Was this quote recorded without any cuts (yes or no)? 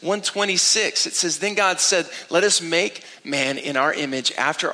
yes